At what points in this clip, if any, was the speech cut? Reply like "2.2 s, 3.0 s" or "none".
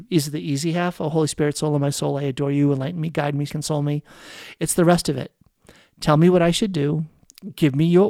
3.5 s

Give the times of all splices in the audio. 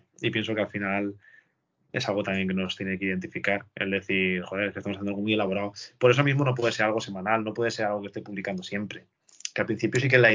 none

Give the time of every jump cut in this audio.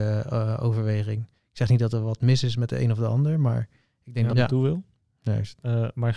4.3 s

